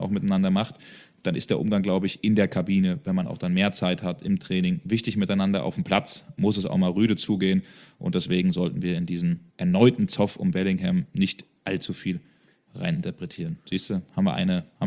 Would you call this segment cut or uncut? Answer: cut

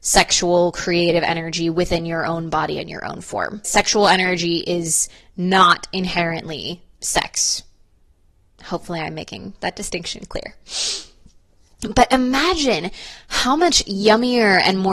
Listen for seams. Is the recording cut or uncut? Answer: cut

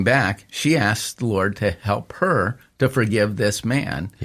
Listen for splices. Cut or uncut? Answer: uncut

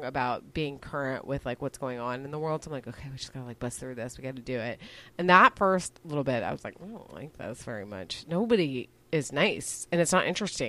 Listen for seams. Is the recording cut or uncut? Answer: uncut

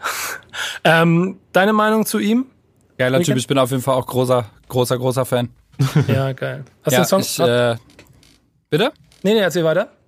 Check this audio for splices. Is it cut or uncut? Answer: uncut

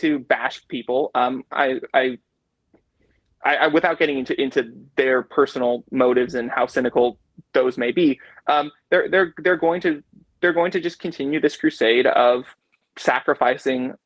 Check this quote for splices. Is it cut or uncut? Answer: uncut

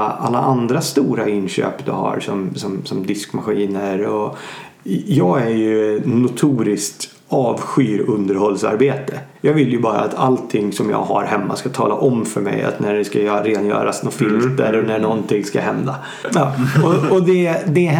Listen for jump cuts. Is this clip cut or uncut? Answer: cut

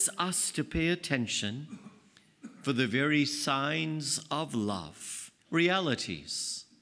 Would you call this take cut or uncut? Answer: cut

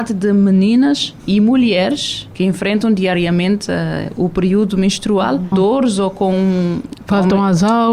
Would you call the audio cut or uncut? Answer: cut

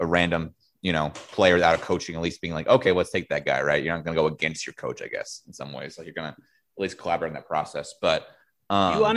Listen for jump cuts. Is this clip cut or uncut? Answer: uncut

